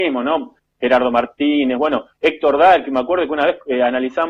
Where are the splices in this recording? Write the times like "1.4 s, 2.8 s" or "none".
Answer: 2.1 s